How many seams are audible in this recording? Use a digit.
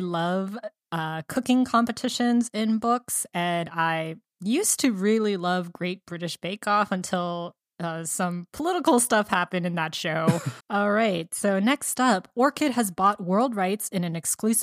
1